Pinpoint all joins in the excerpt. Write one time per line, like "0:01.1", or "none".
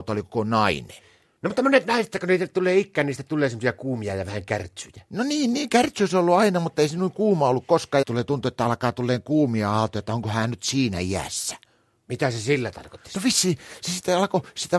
0:08.0